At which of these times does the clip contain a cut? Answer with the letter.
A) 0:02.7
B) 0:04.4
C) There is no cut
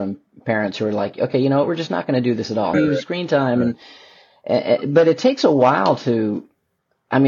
A